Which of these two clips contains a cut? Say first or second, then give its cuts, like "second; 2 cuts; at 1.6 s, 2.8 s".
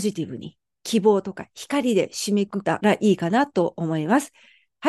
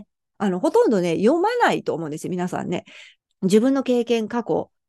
first; 1 cut; at 2.5 s